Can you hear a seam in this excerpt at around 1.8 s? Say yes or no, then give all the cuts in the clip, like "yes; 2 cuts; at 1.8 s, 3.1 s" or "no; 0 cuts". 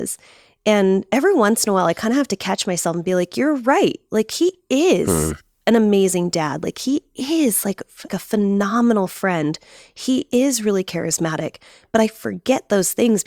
no; 1 cut; at 8.1 s